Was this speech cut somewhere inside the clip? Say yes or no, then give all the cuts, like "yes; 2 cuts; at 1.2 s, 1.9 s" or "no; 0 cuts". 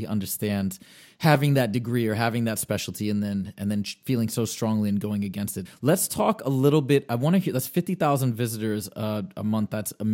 yes; 1 cut; at 5.6 s